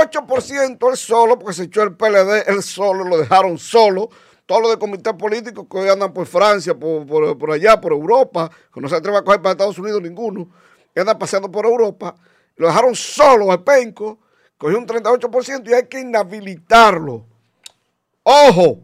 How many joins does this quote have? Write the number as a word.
zero